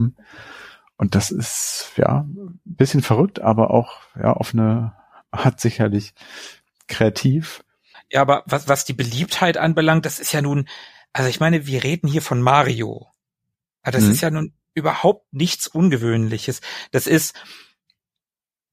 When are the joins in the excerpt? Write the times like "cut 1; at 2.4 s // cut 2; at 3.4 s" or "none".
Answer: cut 1; at 8.6 s